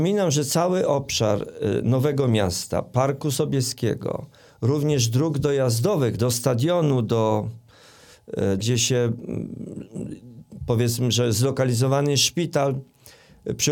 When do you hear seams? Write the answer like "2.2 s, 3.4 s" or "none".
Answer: 6.2 s, 8.6 s